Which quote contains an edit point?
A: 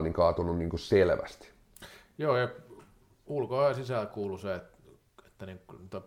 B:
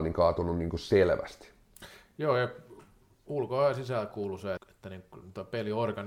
B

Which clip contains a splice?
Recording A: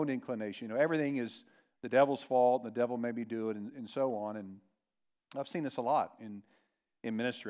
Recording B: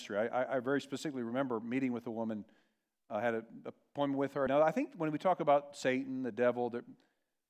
B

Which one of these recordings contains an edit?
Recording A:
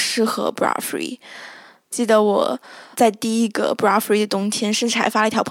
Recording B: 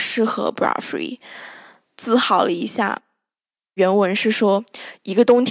B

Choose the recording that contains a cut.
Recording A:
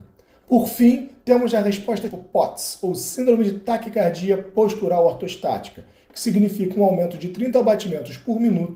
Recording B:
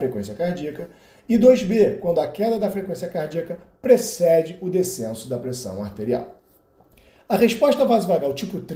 A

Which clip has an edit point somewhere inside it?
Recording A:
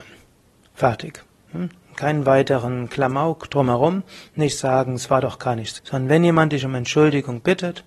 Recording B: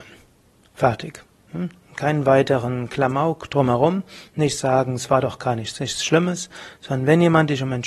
A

